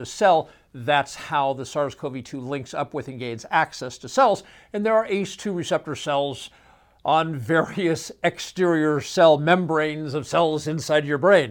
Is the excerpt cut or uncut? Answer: uncut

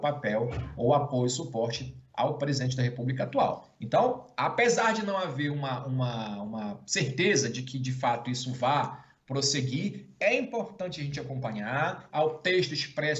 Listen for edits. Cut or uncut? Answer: cut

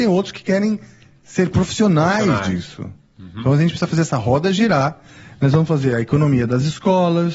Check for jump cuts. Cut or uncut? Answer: uncut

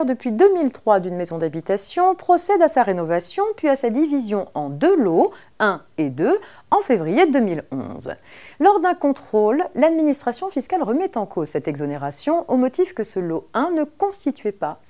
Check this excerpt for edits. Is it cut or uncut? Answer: cut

